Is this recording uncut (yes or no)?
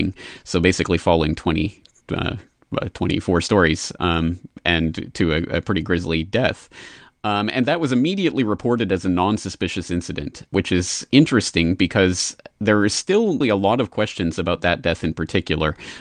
no